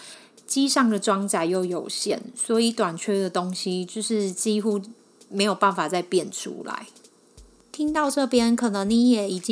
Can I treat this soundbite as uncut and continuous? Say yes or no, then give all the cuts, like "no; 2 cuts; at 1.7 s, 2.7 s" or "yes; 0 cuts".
yes; 0 cuts